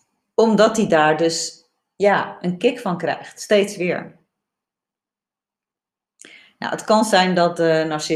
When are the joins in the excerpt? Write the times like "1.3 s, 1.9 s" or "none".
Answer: none